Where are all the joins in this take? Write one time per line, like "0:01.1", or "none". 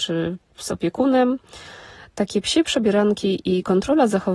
0:02.0